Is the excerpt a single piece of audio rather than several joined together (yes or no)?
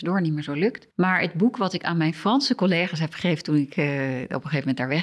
no